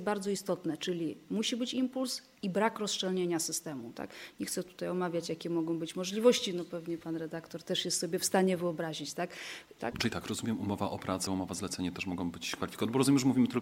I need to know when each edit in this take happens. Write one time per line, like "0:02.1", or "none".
0:09.8
0:11.3